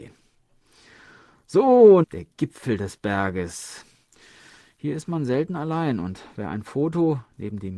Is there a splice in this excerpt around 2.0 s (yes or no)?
yes